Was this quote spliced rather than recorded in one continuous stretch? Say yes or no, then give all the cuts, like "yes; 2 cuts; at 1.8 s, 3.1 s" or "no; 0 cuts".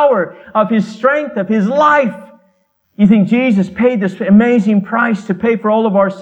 yes; 1 cut; at 2.8 s